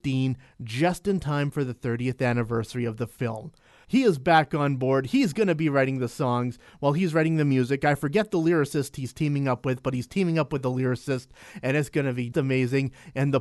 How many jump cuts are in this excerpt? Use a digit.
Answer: 2